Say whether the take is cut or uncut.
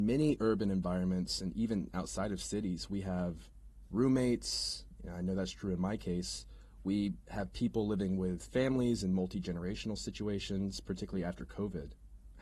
uncut